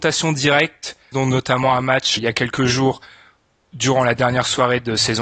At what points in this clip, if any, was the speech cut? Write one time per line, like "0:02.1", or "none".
0:01.1
0:02.2

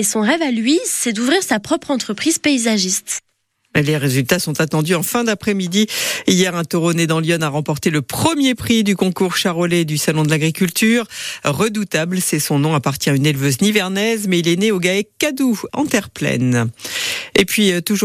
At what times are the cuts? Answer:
0:15.7

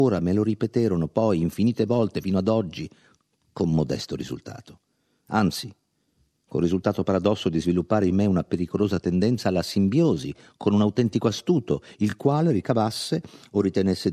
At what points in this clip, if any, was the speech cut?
none

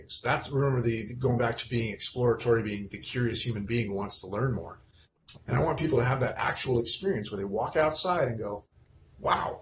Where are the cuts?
0:05.3

